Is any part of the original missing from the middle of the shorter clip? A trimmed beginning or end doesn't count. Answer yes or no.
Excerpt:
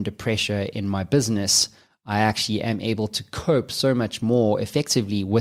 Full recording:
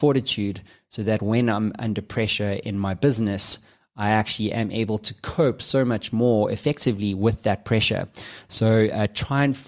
no